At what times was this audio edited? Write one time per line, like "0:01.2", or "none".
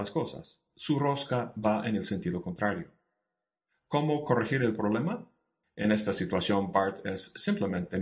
0:05.6